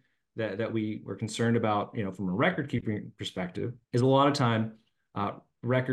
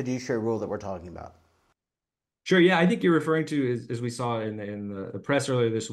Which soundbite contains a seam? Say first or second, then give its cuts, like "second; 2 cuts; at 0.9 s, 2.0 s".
first; 1 cut; at 3.8 s